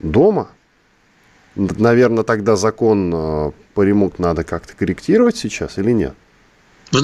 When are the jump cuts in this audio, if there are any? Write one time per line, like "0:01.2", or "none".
0:04.1